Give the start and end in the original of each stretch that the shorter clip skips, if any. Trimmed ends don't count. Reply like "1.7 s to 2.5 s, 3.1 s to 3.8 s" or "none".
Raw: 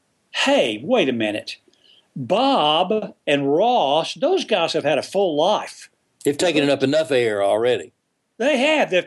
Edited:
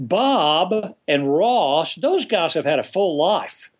none